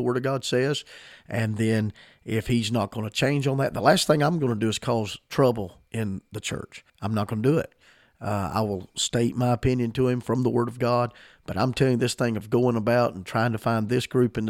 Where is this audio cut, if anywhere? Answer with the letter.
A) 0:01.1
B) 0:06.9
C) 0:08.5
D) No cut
B